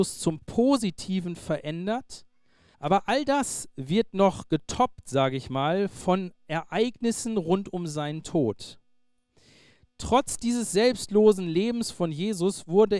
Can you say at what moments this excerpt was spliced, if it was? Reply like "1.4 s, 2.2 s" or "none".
2.7 s